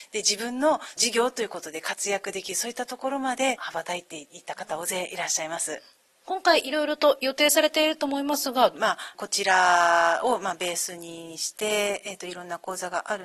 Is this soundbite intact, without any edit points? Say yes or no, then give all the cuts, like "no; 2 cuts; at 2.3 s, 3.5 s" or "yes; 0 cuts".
no; 2 cuts; at 6.2 s, 8.7 s